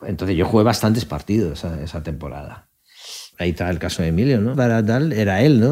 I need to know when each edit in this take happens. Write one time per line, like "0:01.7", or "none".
0:03.3
0:04.5